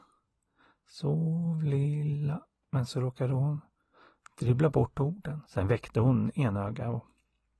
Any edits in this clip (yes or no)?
yes